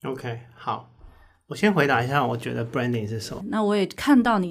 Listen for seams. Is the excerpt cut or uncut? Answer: cut